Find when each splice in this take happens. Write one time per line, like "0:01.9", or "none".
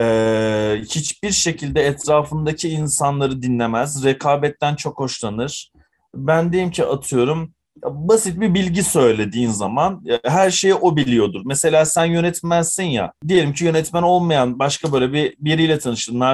none